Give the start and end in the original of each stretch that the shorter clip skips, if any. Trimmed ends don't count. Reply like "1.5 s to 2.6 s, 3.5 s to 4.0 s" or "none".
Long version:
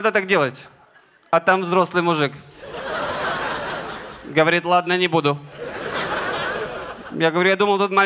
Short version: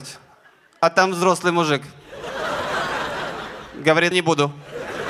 4.6 s to 5.0 s

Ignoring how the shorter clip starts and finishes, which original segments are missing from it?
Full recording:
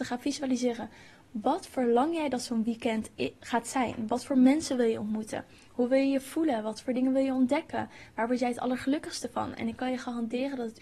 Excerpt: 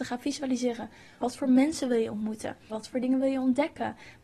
1.2 s to 4.1 s, 5.6 s to 6.6 s

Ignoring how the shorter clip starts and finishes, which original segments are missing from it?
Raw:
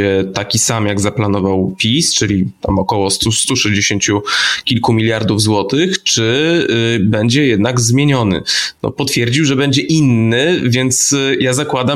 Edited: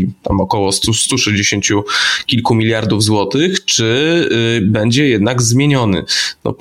none

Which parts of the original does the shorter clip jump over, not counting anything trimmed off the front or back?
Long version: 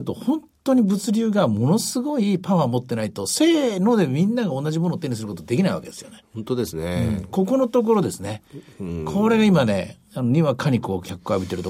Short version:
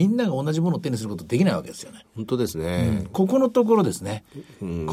none

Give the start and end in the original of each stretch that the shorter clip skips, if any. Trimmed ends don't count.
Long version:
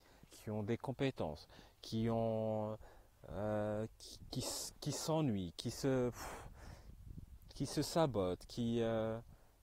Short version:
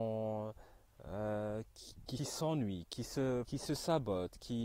4.4 s to 4.8 s, 6.1 s to 7.5 s

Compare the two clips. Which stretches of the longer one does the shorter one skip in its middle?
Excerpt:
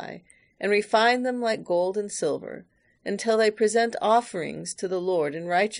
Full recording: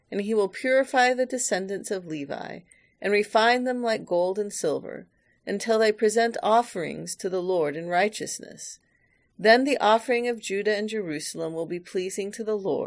none

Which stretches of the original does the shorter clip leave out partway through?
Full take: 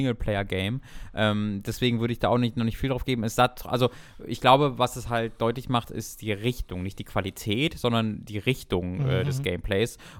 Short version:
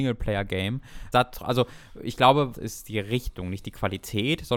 1.1 s to 3.4 s, 4.8 s to 5.8 s

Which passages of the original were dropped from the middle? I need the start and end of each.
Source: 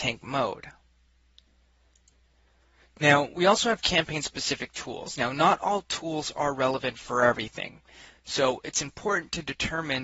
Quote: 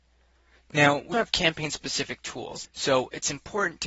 3.4 s to 3.6 s, 5.2 s to 8.2 s

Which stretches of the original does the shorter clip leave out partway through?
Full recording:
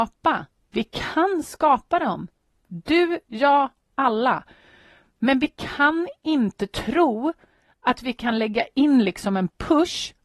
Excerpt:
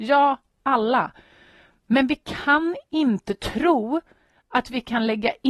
none

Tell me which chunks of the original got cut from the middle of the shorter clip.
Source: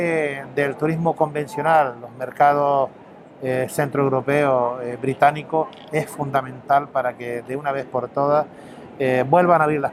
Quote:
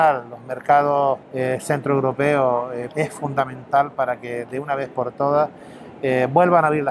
2.9 s to 3.3 s, 5.0 s to 5.9 s

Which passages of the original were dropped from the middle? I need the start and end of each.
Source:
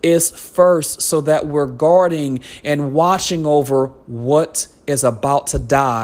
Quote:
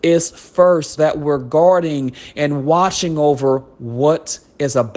1.0 s to 1.2 s

